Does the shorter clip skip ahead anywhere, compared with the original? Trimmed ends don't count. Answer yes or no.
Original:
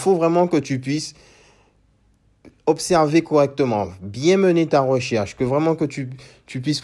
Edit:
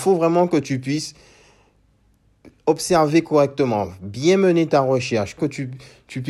yes